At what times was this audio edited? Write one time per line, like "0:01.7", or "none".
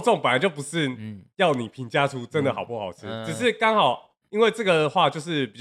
none